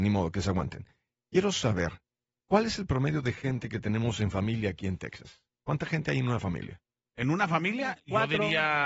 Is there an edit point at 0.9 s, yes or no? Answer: no